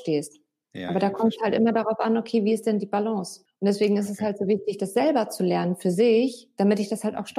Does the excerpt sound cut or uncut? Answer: uncut